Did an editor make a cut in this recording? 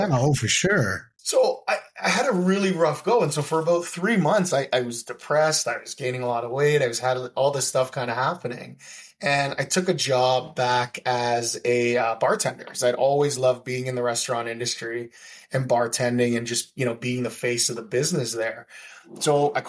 yes; 1 cut; at 1.2 s

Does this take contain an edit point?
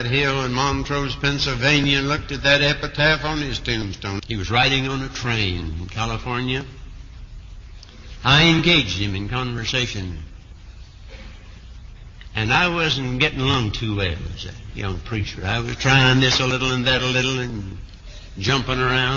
yes; 1 cut; at 4.2 s

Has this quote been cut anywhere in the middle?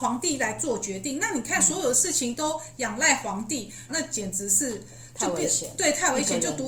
yes; 1 cut; at 3.9 s

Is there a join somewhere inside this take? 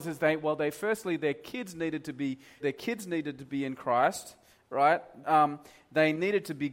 yes; 2 cuts; at 2.6 s, 5.2 s

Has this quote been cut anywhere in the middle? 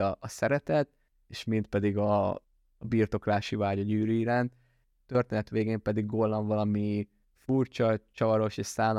no; 0 cuts

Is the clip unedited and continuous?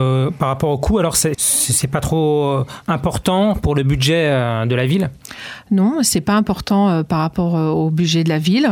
no; 1 cut; at 1.3 s

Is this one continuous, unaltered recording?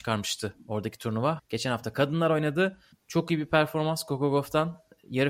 no; 2 cuts; at 1.4 s, 2.9 s

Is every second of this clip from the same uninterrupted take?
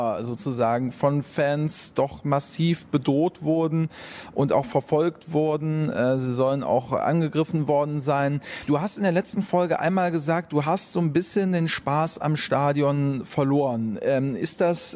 yes; 0 cuts

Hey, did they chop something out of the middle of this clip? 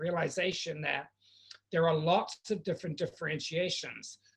no; 0 cuts

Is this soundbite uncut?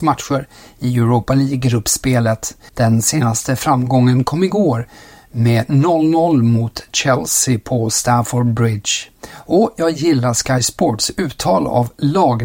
no; 1 cut; at 2.7 s

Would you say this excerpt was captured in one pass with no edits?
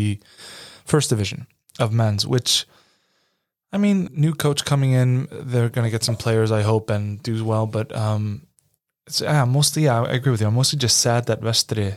no; 1 cut; at 4.1 s

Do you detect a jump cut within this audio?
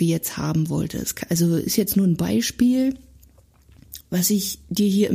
no; 0 cuts

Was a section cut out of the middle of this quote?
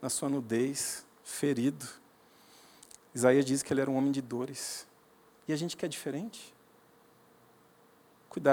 no; 0 cuts

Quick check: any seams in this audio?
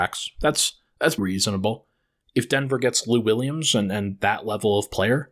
yes; 1 cut; at 1.2 s

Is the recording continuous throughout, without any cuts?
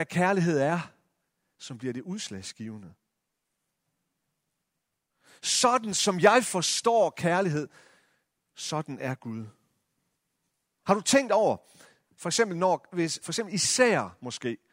no; 2 cuts; at 10.8 s, 13.2 s

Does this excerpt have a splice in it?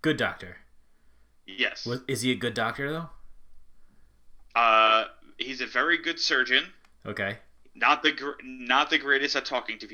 no; 0 cuts

